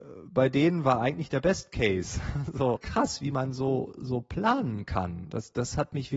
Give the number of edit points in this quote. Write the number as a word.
one